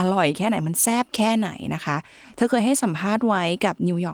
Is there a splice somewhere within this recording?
no; 0 cuts

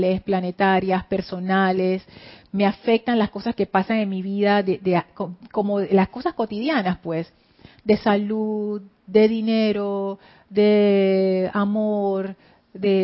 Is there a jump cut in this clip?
no; 0 cuts

